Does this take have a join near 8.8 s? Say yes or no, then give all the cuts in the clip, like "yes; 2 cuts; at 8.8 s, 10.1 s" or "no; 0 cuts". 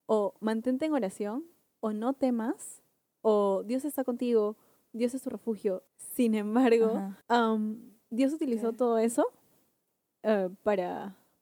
no; 2 cuts; at 5.9 s, 7.2 s